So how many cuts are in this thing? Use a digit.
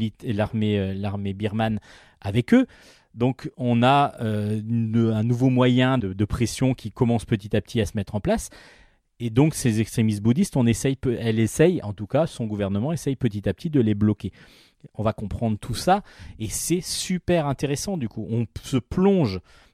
1